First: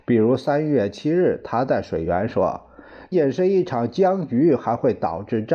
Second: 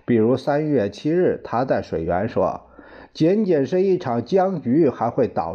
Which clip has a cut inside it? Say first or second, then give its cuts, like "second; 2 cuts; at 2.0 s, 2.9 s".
first; 1 cut; at 3.1 s